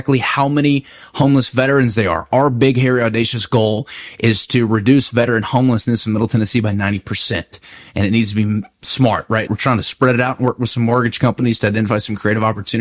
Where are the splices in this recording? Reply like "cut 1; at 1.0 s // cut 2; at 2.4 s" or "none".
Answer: cut 1; at 9.5 s